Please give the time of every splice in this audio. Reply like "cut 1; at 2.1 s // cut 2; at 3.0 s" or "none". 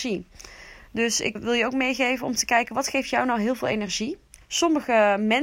cut 1; at 1.3 s // cut 2; at 4.4 s